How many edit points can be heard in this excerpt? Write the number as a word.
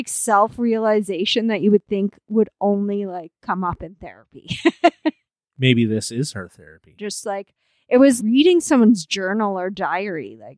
two